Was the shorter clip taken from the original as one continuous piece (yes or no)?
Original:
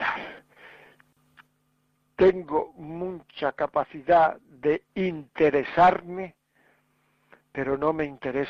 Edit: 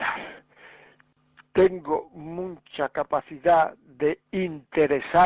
no